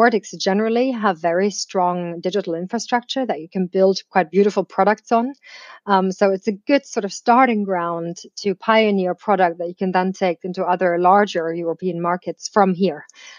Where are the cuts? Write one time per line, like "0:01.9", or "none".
none